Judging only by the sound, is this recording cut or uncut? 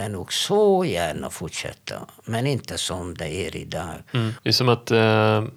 cut